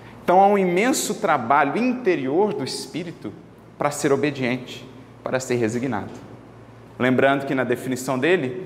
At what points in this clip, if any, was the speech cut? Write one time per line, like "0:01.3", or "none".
none